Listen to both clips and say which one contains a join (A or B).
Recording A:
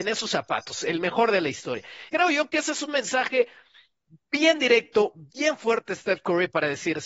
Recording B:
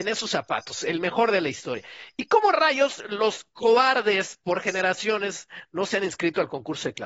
A